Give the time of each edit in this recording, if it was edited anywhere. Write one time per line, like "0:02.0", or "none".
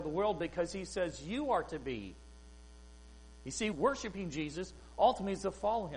0:03.7